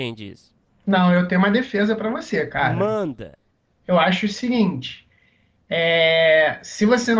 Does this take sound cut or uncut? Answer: uncut